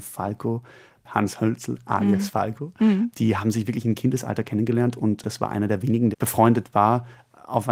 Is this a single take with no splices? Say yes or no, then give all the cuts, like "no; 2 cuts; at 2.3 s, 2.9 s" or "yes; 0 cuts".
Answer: no; 1 cut; at 6.1 s